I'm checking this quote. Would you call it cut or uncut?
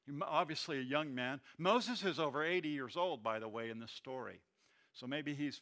uncut